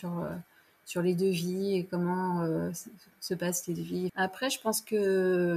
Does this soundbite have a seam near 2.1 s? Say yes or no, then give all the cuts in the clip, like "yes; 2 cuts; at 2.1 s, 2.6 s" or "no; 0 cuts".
no; 1 cut; at 4.1 s